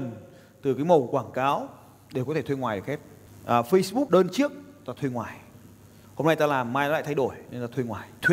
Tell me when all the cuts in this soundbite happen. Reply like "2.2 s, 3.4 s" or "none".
4.1 s